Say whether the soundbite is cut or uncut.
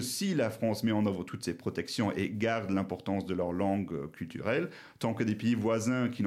uncut